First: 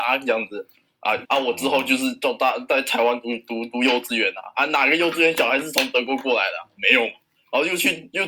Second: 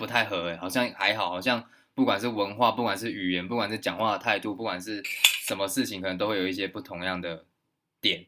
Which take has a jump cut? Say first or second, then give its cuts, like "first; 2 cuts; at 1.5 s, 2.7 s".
first; 1 cut; at 1.2 s